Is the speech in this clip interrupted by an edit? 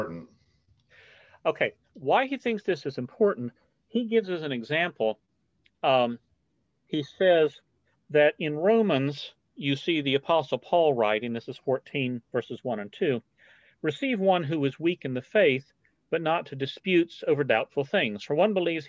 no; 0 cuts

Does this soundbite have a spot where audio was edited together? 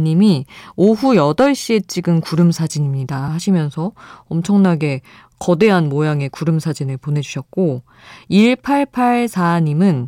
no; 0 cuts

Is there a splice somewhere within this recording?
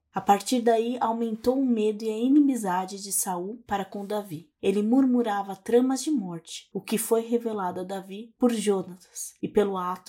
no; 0 cuts

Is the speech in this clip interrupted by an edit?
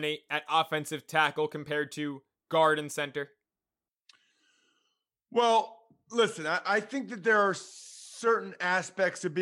no; 0 cuts

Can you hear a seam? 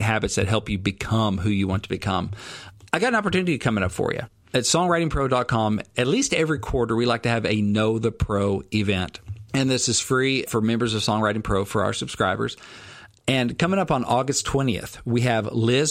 no; 0 cuts

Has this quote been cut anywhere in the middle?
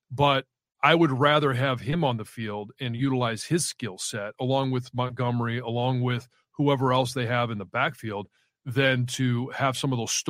no; 0 cuts

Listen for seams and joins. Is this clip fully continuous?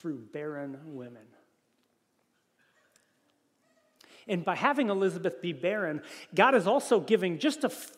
yes; 0 cuts

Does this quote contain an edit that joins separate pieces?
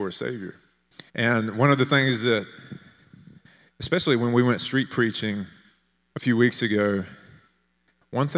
yes; 2 cuts; at 1.1 s, 6.1 s

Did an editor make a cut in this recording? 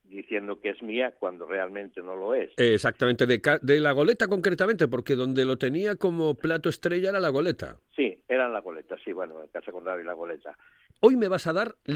yes; 1 cut; at 10.9 s

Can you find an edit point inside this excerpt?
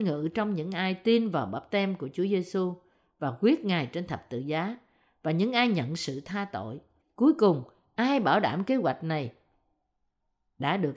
yes; 1 cut; at 7.0 s

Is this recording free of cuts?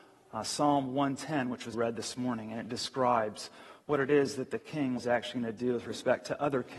no; 2 cuts; at 1.7 s, 5.0 s

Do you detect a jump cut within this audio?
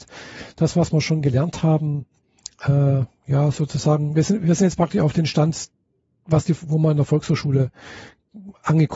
yes; 1 cut; at 3.1 s

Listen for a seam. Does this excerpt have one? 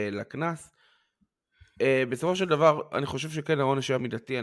no; 0 cuts

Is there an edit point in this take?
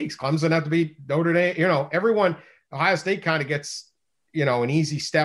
no; 0 cuts

